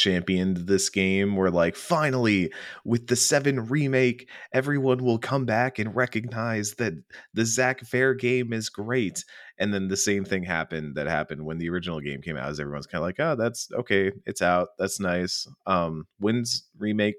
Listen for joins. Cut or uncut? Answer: uncut